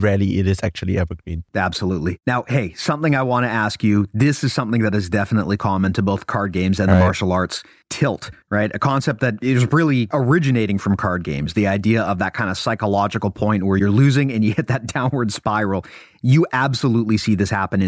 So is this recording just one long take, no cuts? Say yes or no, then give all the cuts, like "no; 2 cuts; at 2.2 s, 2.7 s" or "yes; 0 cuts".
yes; 0 cuts